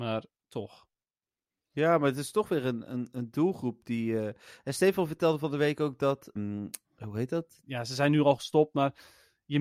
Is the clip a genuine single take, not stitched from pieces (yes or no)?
no